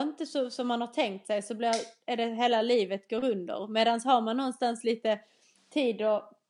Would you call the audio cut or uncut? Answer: uncut